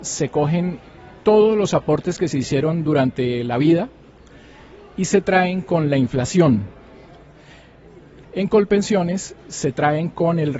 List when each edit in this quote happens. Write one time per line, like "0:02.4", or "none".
0:08.2

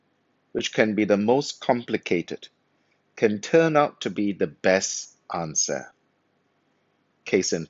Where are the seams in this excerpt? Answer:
none

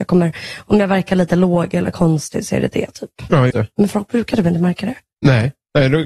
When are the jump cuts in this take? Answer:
0:03.5

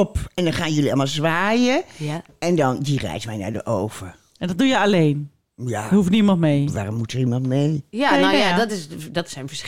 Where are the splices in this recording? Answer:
none

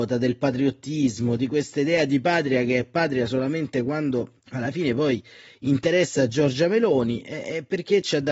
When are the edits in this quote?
0:04.4

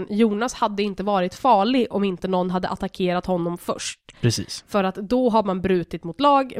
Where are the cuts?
none

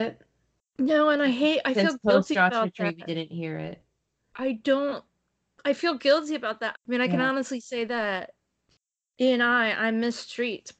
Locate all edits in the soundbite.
0:06.7

